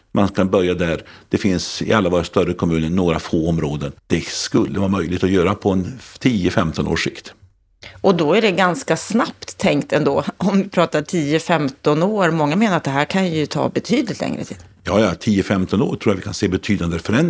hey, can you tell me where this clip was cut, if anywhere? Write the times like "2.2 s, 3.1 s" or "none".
4.0 s